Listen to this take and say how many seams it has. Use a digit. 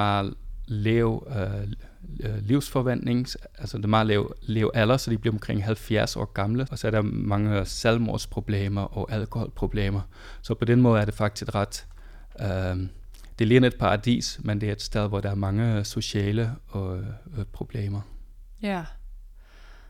1